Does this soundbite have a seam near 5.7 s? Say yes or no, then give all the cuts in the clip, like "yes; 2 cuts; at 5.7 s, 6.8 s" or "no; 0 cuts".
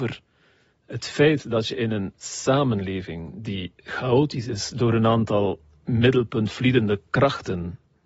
no; 1 cut; at 3.8 s